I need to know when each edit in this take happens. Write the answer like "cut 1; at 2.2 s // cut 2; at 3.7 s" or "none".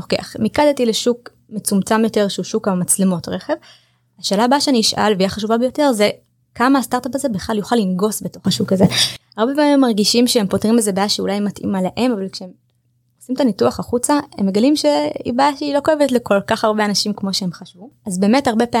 cut 1; at 9.2 s